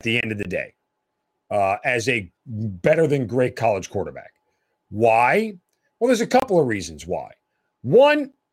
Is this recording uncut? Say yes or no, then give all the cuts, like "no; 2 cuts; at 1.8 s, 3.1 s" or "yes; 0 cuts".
no; 1 cut; at 2.4 s